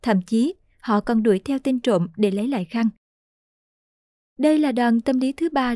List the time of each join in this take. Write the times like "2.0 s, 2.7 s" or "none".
none